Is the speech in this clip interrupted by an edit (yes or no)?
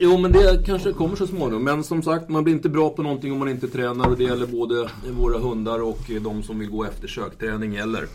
no